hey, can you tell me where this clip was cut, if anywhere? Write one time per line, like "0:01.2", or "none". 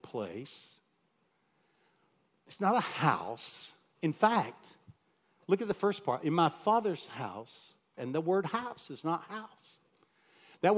0:08.0